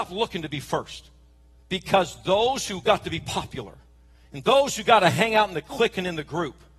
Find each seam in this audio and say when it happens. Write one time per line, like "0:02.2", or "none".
0:01.6